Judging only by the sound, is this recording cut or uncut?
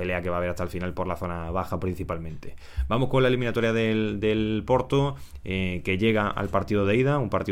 uncut